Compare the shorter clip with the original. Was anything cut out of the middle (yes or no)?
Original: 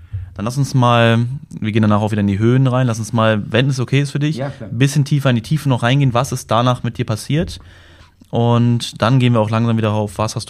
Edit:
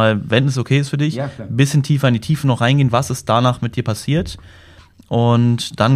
no